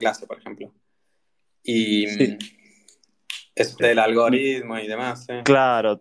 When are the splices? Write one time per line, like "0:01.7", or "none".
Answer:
0:03.8